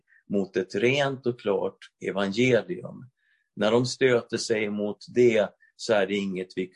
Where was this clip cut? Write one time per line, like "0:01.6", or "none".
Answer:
none